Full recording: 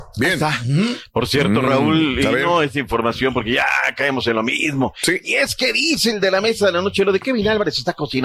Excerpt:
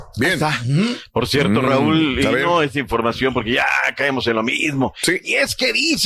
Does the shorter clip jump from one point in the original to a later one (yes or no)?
no